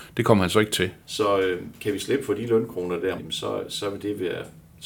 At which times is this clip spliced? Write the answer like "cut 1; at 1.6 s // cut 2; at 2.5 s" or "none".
cut 1; at 1.0 s // cut 2; at 3.2 s